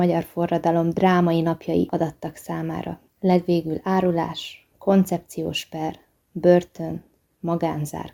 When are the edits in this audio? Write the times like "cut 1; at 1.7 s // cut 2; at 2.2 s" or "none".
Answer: none